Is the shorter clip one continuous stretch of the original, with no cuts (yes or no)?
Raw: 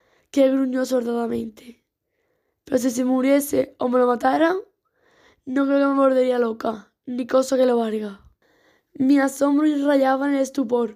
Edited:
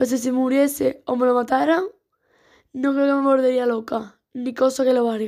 yes